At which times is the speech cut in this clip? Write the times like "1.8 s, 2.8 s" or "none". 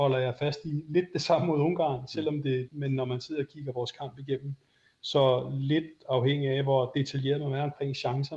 2.7 s